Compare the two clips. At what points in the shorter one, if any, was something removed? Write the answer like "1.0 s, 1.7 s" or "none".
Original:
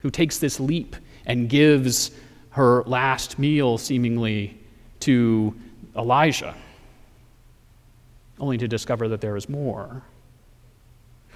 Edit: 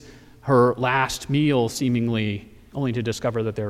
2.7 s